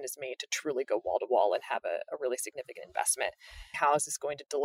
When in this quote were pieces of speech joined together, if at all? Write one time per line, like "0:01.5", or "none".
0:03.7